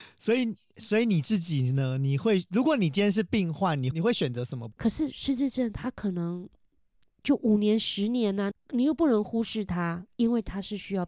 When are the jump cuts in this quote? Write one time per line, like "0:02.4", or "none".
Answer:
0:04.7
0:08.5